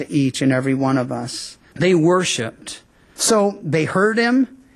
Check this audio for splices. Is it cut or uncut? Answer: cut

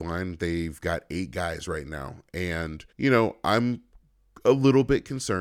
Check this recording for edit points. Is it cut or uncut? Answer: cut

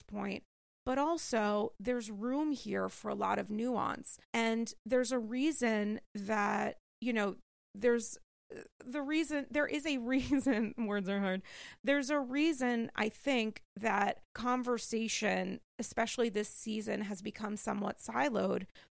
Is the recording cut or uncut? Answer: cut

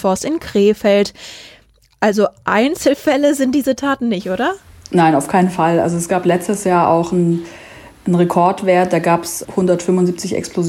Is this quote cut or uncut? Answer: uncut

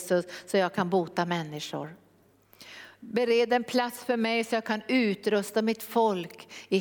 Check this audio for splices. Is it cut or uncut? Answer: uncut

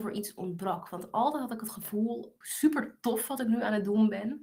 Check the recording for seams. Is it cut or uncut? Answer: cut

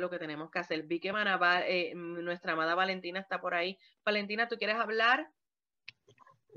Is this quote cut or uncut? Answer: uncut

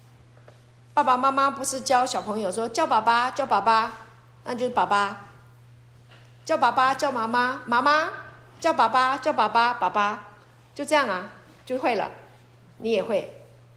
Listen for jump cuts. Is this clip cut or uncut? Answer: uncut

